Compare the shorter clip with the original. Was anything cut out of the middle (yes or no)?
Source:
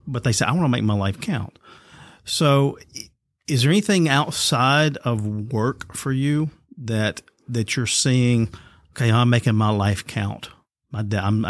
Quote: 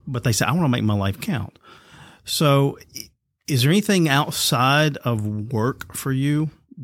no